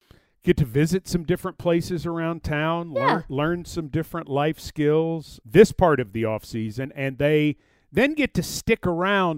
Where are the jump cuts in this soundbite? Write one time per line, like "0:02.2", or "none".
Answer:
0:05.4

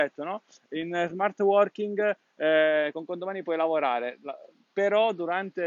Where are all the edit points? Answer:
none

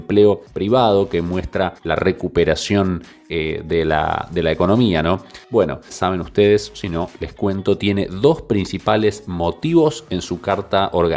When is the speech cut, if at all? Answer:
0:05.9

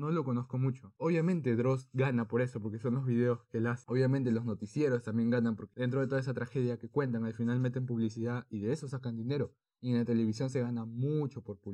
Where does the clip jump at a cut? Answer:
0:01.0

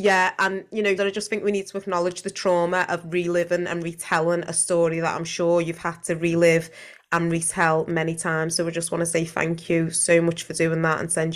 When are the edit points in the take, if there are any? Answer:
0:01.0

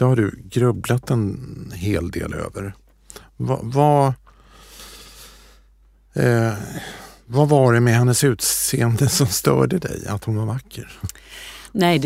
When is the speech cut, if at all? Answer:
none

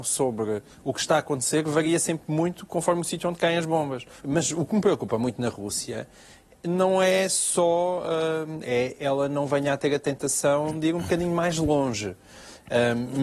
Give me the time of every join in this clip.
0:04.2
0:08.6

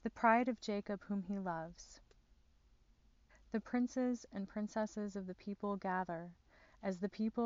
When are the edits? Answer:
0:03.3

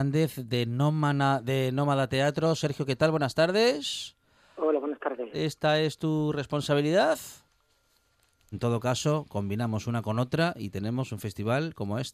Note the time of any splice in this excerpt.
0:05.3
0:08.5

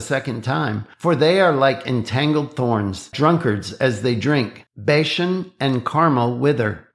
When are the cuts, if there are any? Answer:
0:03.1
0:04.7

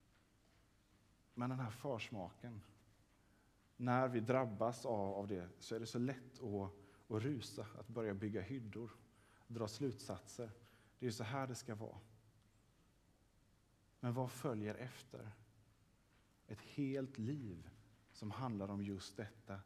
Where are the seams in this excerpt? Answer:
none

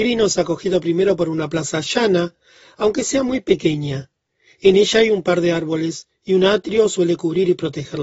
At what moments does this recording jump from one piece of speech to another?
none

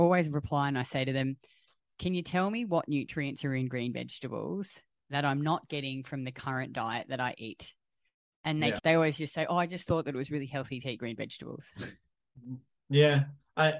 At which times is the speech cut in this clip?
0:08.8

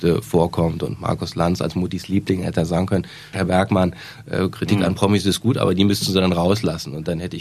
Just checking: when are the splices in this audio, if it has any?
0:03.3

